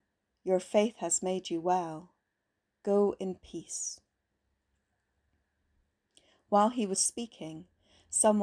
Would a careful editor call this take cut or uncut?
cut